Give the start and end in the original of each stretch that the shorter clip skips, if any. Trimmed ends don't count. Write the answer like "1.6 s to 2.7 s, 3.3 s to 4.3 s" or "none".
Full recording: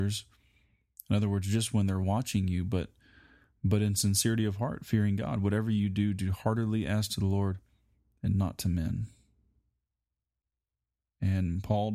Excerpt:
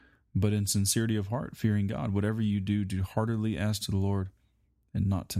none